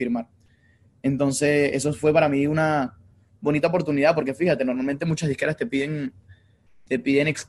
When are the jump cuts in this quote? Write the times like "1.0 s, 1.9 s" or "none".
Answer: none